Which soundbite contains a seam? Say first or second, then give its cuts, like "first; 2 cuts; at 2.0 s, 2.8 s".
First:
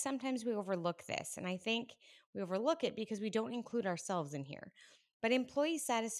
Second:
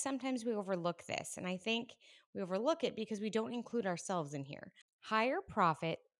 second; 1 cut; at 4.8 s